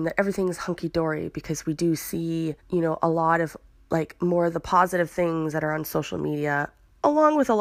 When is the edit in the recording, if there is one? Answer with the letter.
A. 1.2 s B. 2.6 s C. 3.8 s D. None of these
B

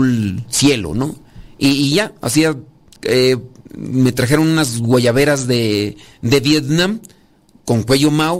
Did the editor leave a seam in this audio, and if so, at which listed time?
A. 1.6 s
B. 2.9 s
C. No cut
B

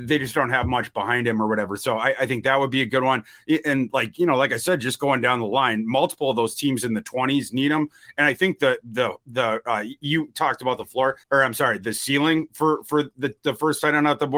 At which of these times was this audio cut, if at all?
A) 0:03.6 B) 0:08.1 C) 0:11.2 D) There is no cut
C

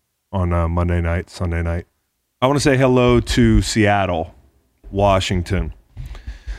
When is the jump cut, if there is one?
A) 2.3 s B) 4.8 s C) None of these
B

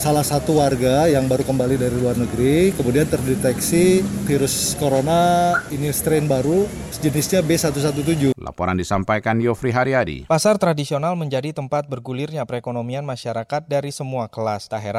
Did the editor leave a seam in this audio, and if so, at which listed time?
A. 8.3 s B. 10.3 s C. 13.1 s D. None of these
A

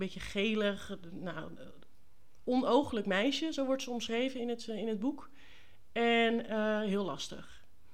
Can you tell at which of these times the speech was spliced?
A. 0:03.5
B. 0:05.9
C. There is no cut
C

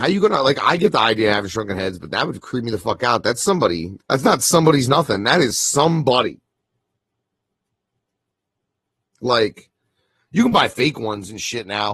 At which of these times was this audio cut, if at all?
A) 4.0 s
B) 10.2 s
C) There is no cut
A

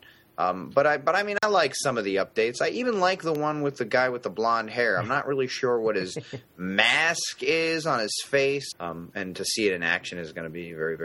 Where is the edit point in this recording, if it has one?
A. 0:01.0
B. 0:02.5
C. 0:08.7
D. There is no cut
C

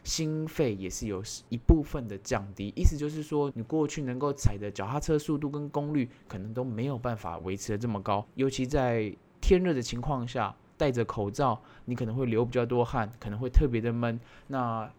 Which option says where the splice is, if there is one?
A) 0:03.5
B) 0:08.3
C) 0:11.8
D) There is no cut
A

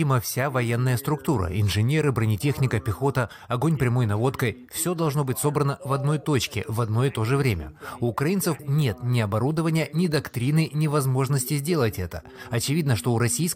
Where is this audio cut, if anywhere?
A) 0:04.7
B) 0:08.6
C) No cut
B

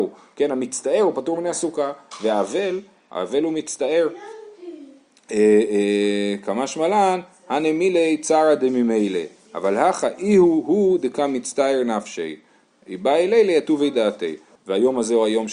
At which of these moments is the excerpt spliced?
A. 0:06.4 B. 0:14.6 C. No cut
B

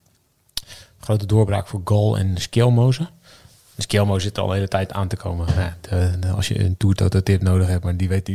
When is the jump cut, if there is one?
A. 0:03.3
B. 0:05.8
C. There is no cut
C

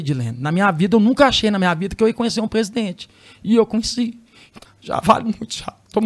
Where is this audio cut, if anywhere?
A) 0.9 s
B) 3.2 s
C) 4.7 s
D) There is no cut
C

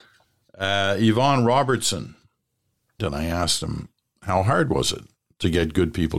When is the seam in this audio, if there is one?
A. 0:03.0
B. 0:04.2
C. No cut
A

